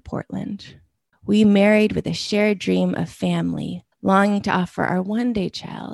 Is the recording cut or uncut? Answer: cut